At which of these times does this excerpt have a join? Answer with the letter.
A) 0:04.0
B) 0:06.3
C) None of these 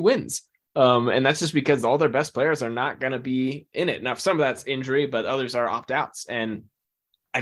C